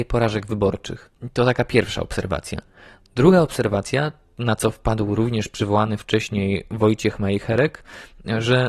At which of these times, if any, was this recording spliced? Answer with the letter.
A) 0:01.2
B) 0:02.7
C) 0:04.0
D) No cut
D